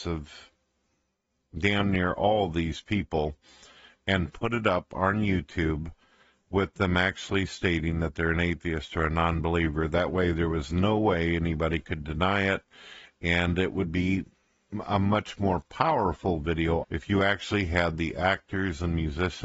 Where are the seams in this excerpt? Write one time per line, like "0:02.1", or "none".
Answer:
0:16.8